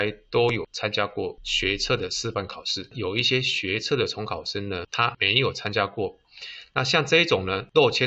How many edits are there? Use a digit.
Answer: 0